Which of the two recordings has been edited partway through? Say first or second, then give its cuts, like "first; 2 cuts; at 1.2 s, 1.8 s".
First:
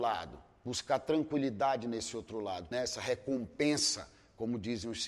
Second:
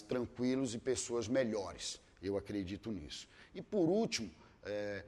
first; 1 cut; at 2.7 s